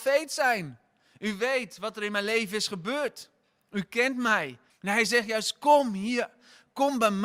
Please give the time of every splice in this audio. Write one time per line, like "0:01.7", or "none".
0:04.7